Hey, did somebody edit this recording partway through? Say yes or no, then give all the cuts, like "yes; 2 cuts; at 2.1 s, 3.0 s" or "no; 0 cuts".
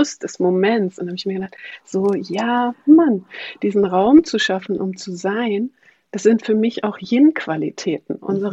no; 0 cuts